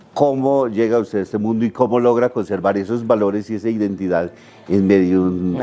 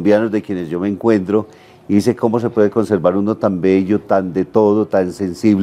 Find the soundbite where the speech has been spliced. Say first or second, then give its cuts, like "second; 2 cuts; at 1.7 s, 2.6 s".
second; 1 cut; at 4.0 s